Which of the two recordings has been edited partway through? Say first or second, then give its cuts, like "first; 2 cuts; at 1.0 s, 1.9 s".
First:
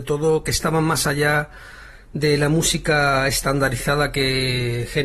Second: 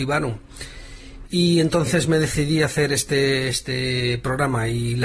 second; 1 cut; at 1.3 s